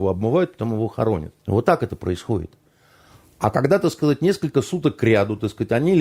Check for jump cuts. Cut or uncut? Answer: cut